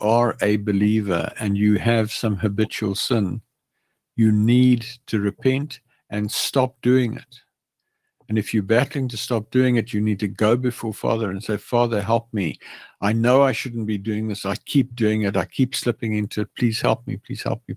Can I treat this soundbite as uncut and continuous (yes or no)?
yes